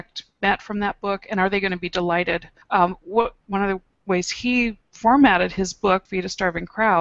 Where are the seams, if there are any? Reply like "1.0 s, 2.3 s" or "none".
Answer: 3.4 s, 6.1 s